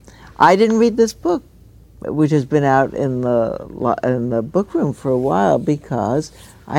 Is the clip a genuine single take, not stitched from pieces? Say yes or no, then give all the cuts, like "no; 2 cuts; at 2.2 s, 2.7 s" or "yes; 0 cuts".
yes; 0 cuts